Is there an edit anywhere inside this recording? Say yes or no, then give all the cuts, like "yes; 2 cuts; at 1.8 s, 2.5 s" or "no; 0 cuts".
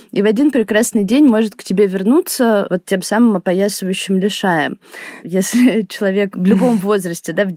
yes; 2 cuts; at 5.2 s, 6.3 s